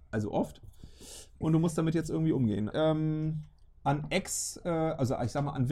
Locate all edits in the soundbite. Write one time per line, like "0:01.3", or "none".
0:02.7